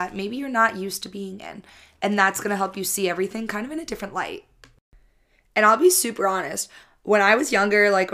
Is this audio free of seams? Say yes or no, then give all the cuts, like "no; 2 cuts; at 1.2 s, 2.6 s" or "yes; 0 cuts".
yes; 0 cuts